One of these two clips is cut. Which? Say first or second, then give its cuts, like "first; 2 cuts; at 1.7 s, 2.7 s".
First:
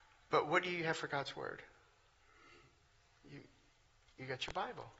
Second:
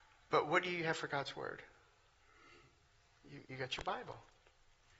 second; 1 cut; at 3.4 s